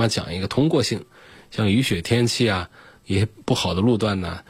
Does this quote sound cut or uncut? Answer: uncut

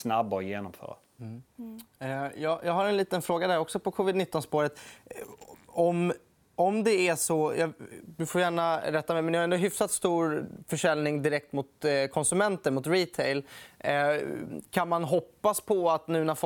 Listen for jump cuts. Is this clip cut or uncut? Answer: uncut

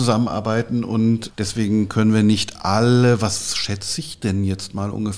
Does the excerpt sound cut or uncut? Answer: cut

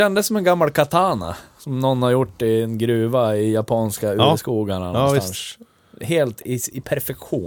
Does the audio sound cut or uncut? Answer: uncut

